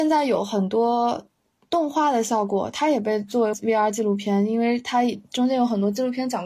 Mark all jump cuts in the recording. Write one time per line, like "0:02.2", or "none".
0:03.5